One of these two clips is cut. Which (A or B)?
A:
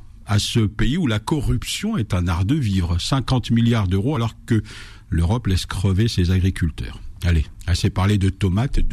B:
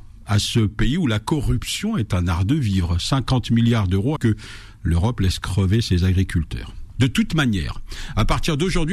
B